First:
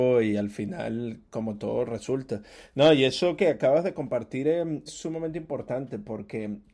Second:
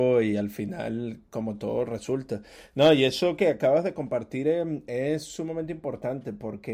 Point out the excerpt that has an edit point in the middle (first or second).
first